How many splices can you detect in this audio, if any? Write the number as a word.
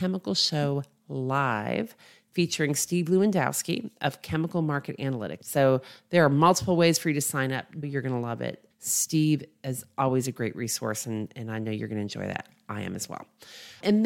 two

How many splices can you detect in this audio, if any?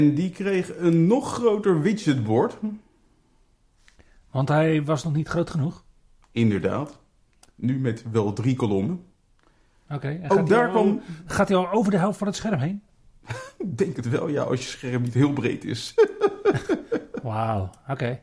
zero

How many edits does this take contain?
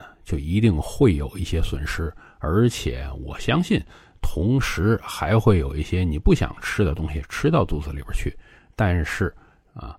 zero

